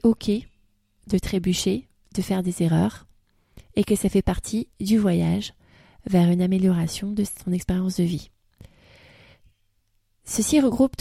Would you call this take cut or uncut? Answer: uncut